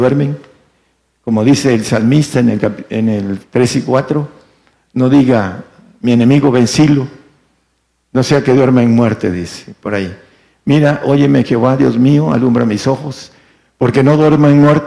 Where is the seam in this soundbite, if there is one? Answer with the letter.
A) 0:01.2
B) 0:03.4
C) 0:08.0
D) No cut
B